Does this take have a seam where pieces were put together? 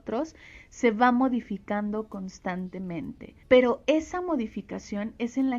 yes; 1 cut; at 3.4 s

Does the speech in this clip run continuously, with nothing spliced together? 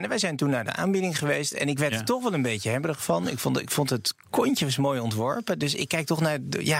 yes; 0 cuts

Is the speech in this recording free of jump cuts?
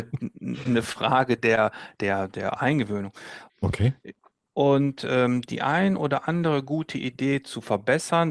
no; 1 cut; at 3.5 s

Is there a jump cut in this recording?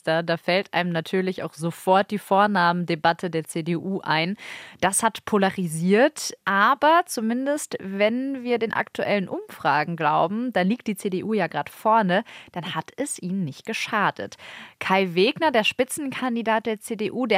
no; 0 cuts

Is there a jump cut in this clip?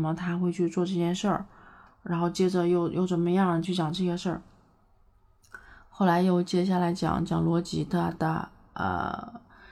yes; 1 cut; at 3.6 s

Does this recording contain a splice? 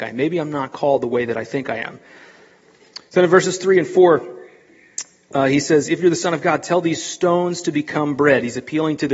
no; 0 cuts

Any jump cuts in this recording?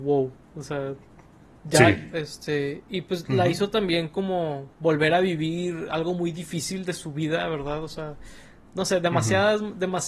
yes; 1 cut; at 2.1 s

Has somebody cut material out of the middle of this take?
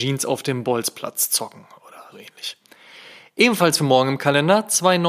yes; 1 cut; at 2.1 s

